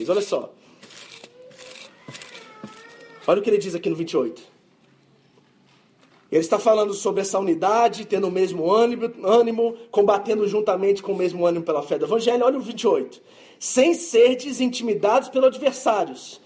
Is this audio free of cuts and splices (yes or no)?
yes